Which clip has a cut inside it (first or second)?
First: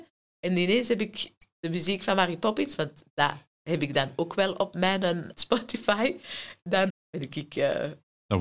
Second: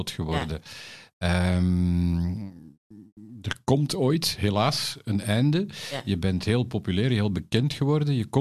first